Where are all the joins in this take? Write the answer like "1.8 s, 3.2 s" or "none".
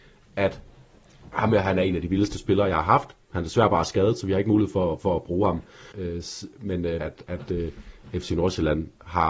5.9 s, 7.0 s

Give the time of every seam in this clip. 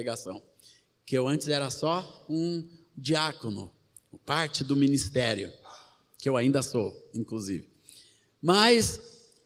none

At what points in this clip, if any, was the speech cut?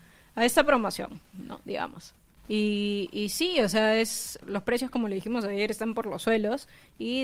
2.4 s, 4.4 s

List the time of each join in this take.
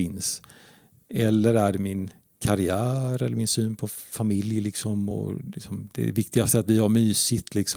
none

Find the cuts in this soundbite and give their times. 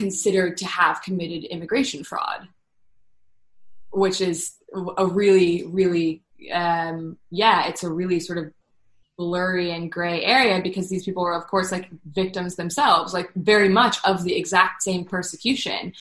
none

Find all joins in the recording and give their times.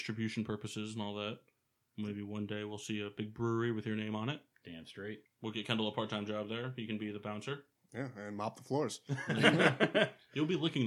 5.3 s

